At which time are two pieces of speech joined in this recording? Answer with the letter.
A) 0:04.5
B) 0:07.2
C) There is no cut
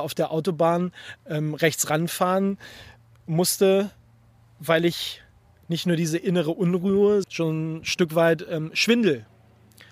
B